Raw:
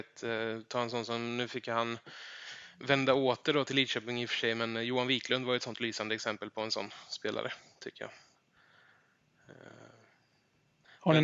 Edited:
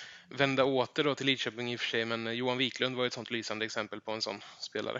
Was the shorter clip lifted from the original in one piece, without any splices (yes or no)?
yes